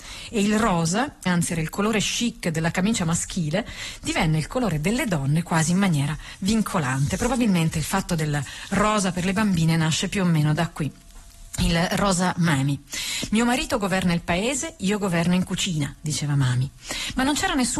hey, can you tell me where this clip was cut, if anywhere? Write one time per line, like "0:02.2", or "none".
0:01.3